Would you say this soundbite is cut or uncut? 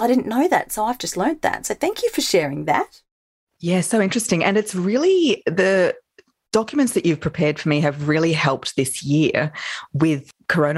uncut